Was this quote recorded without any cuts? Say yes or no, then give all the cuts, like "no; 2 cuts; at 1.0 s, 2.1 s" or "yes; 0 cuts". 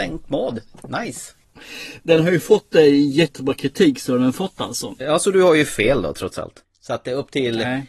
no; 1 cut; at 6.6 s